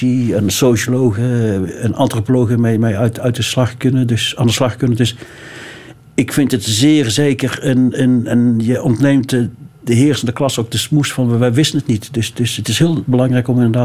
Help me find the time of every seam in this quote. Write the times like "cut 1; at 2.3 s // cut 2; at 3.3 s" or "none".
none